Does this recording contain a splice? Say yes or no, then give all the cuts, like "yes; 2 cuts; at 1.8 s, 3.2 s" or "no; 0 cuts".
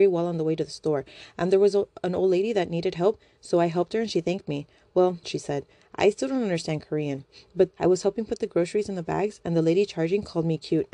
yes; 2 cuts; at 5.2 s, 7.7 s